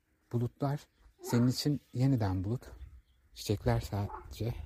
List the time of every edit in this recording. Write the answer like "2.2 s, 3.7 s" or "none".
3.3 s